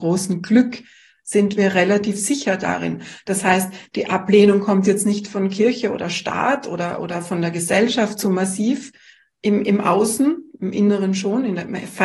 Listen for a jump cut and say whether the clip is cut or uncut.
uncut